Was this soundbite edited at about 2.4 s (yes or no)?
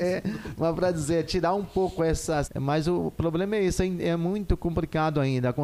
yes